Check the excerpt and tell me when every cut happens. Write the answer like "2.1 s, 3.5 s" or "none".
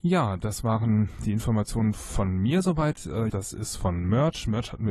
3.3 s